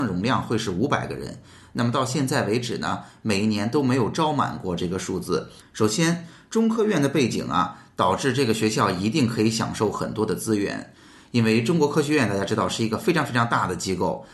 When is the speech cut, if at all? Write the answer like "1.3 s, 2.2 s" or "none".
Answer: 5.6 s